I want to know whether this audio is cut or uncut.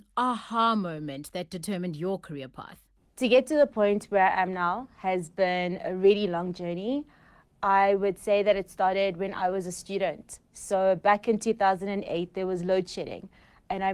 uncut